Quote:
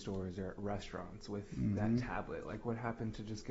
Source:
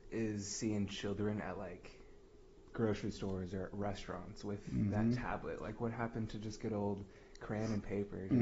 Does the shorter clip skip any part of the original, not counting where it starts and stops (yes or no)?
no